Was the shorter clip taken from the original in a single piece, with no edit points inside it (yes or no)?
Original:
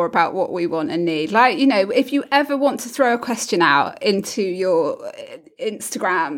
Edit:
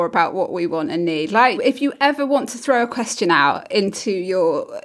no